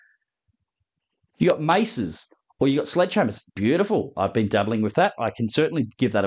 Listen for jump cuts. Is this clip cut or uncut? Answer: uncut